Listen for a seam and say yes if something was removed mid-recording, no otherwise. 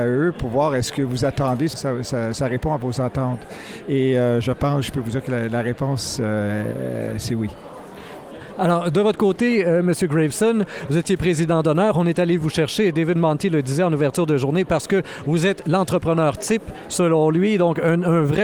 yes